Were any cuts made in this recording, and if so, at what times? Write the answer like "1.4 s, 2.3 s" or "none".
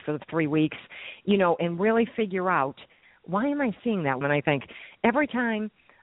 4.2 s